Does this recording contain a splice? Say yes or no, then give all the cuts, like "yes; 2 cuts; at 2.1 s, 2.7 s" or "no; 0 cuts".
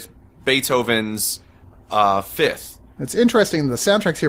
yes; 1 cut; at 3.0 s